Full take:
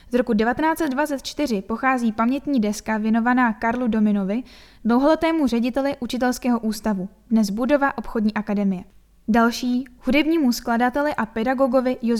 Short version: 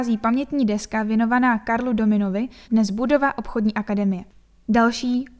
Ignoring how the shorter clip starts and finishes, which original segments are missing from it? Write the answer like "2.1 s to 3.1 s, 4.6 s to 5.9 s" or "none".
4.6 s to 7.2 s